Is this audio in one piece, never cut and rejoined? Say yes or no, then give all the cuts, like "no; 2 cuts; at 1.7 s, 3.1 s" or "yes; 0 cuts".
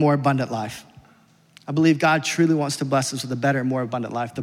yes; 0 cuts